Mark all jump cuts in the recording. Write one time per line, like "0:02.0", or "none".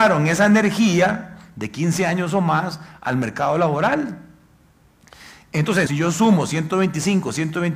0:05.9